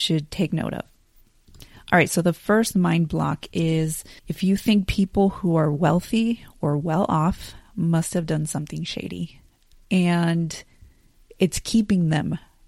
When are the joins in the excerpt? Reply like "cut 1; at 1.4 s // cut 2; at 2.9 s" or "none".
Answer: cut 1; at 4.2 s // cut 2; at 9.7 s

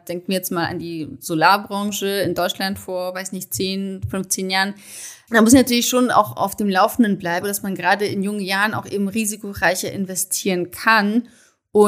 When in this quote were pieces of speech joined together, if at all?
cut 1; at 7.4 s

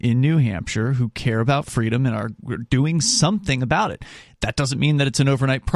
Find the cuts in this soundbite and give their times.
none

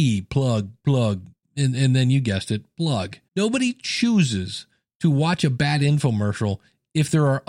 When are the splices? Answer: cut 1; at 1.4 s // cut 2; at 3.3 s

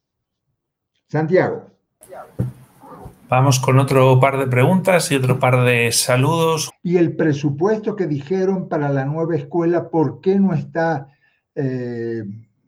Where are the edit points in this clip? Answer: cut 1; at 6.7 s

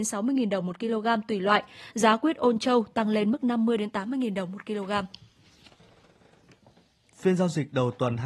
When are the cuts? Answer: none

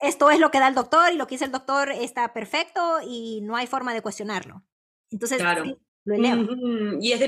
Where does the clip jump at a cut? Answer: cut 1; at 5.9 s

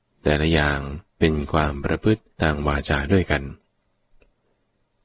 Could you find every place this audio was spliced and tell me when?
cut 1; at 1.1 s // cut 2; at 2.3 s

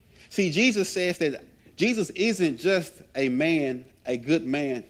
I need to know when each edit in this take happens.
none

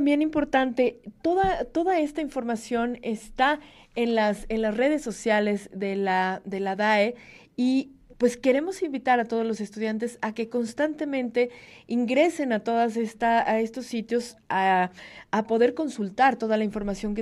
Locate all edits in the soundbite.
none

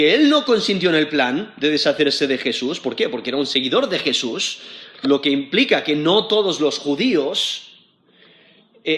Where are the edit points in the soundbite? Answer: none

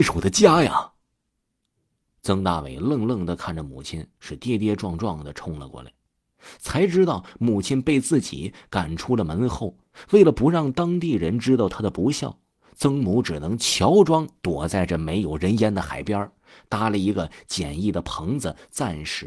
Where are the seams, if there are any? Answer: none

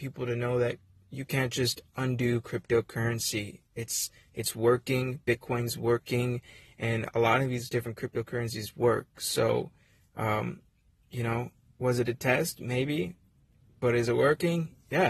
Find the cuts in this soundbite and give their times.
none

